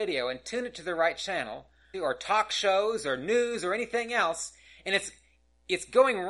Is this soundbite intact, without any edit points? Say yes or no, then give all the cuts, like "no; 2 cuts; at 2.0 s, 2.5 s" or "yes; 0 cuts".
no; 1 cut; at 1.9 s